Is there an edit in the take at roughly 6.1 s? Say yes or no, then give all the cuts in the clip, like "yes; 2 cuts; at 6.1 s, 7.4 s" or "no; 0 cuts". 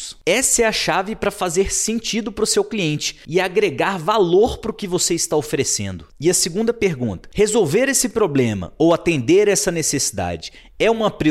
yes; 1 cut; at 6.1 s